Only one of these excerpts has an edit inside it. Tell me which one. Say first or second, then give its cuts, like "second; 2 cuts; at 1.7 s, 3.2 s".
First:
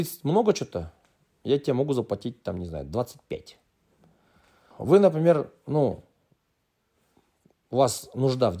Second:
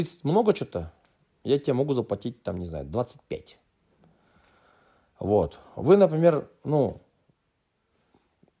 first; 1 cut; at 4.7 s